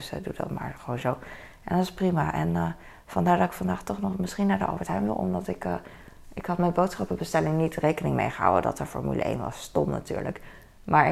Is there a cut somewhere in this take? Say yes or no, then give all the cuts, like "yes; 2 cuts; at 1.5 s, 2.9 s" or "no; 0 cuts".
no; 0 cuts